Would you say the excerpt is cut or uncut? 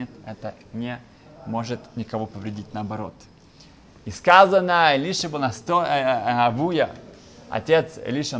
uncut